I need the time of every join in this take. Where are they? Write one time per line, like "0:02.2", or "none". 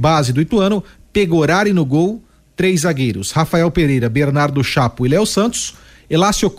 none